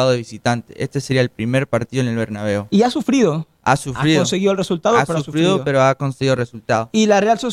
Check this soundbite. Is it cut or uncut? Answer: uncut